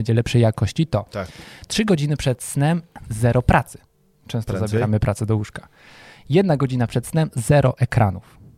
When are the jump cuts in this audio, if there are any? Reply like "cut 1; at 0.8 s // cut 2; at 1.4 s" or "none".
cut 1; at 3.0 s